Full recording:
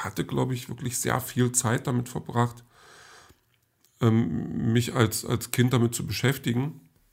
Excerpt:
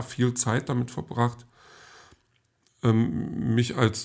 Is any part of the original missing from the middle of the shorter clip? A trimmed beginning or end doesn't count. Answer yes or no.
no